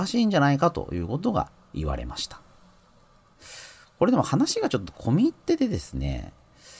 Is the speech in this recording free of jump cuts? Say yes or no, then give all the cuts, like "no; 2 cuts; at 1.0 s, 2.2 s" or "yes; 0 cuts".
yes; 0 cuts